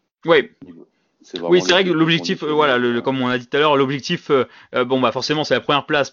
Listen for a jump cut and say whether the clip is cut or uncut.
uncut